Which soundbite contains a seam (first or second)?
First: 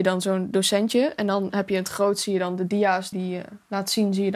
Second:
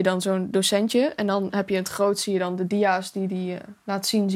first